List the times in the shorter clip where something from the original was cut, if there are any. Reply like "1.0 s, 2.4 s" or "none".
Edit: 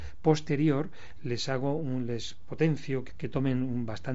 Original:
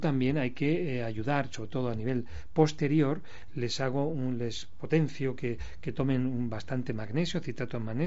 3.1 s